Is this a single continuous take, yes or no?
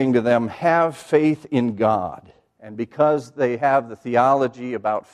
no